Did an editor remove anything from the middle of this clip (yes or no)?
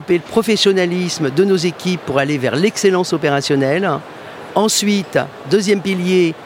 no